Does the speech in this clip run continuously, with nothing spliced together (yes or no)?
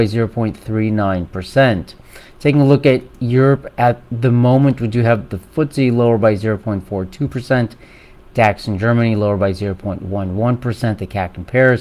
yes